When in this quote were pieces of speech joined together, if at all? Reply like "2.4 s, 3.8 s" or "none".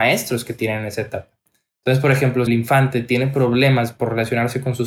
2.5 s